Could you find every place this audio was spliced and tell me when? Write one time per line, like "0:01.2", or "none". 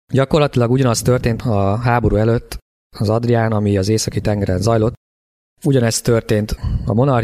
0:05.5

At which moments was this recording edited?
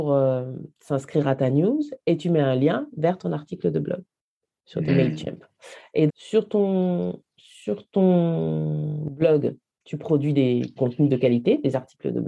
0:04.9
0:06.1
0:10.8

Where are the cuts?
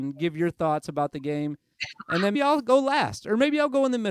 0:02.3

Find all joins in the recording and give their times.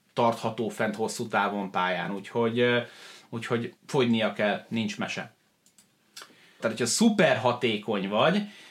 0:03.8
0:06.6

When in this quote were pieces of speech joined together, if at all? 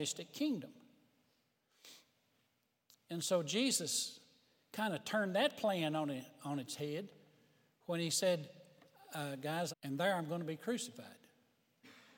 0:09.7

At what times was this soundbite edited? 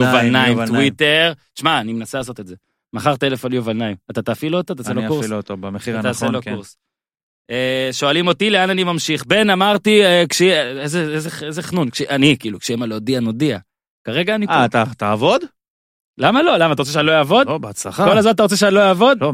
none

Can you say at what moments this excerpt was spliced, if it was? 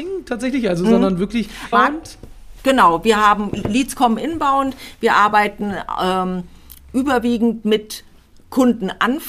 0:01.7

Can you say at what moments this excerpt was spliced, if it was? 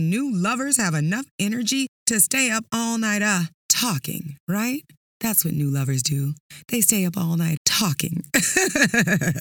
0:03.6
0:07.6

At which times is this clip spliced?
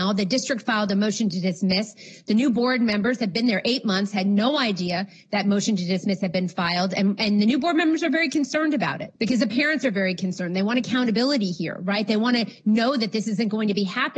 0:09.2

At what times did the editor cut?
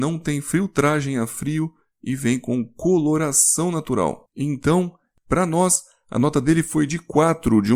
none

